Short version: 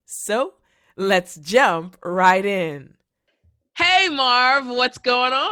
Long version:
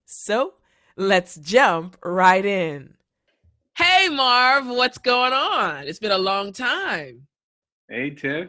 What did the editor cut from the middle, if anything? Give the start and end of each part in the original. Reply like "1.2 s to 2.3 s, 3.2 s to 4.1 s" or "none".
none